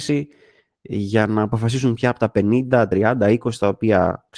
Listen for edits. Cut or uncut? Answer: uncut